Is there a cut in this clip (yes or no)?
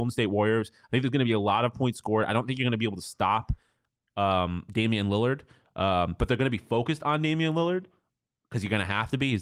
no